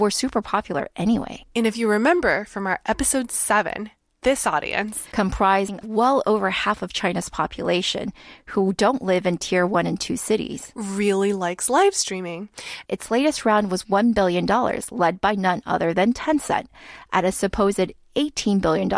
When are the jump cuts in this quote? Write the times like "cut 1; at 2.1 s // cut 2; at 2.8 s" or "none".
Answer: cut 1; at 12.9 s